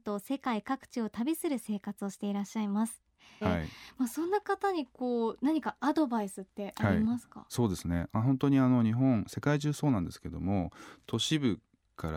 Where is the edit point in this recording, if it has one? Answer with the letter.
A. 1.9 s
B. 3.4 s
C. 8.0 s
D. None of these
B